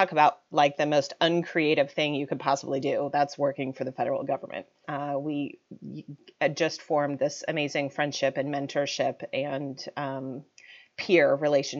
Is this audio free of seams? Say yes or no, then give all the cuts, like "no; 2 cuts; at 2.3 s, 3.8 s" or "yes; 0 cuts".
no; 1 cut; at 4.8 s